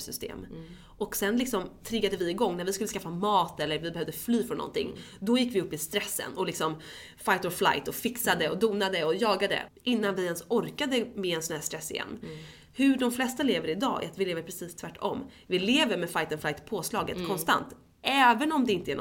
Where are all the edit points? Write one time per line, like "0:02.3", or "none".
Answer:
0:09.7